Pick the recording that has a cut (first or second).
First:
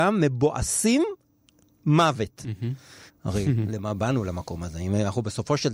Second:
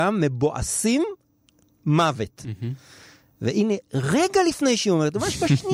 first